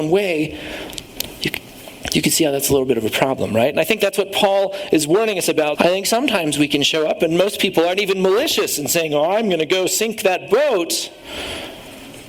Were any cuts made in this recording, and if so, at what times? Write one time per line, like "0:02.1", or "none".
0:05.8